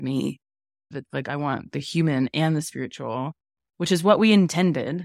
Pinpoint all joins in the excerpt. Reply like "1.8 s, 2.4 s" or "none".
0.9 s